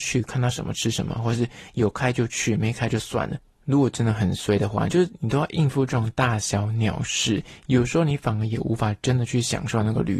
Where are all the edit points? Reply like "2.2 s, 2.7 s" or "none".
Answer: 4.9 s